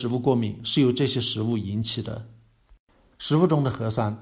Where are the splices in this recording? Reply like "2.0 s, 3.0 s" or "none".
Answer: 3.1 s